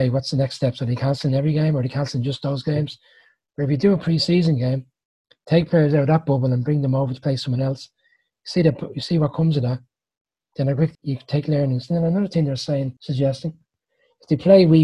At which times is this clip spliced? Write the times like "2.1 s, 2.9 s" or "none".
11.0 s, 13.0 s